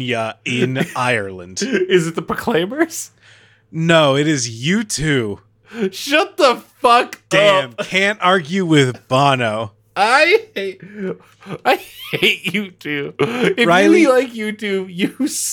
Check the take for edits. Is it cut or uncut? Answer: uncut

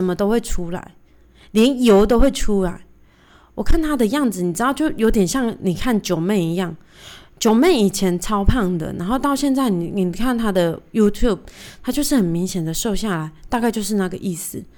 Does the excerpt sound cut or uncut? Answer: uncut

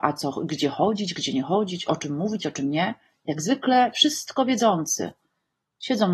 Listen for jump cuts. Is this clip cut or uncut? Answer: uncut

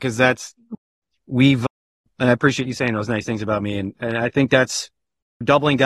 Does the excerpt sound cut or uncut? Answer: uncut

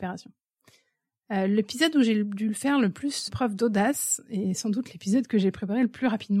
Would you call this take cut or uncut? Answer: cut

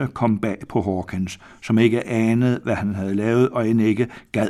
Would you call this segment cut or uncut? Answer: uncut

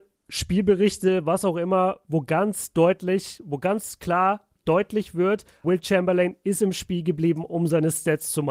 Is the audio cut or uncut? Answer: cut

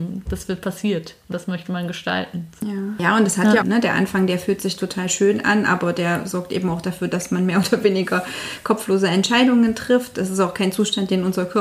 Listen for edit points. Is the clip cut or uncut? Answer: cut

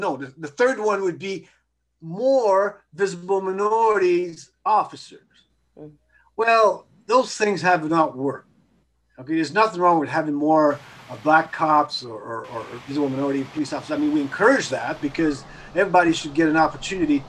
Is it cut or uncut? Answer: uncut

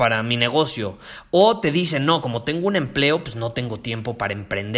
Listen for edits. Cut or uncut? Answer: uncut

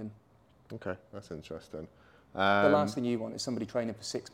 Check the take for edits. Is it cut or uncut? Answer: uncut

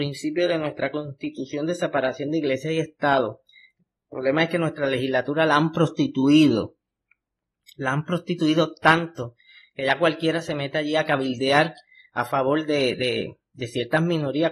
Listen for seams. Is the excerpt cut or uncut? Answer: uncut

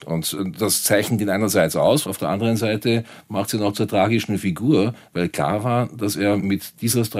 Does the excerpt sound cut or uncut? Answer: uncut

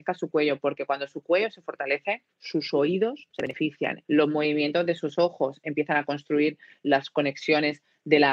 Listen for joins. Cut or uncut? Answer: cut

